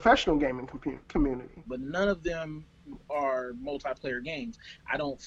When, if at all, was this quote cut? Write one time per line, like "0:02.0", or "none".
0:01.7